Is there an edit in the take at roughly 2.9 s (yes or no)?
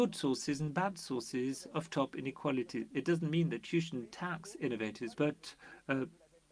yes